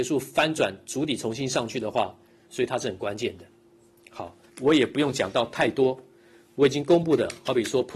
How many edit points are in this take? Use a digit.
2